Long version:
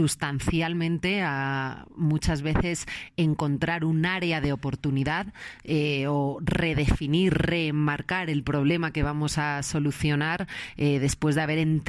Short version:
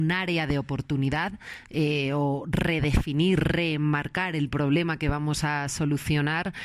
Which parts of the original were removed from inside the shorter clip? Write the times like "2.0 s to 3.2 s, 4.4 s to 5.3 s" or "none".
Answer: none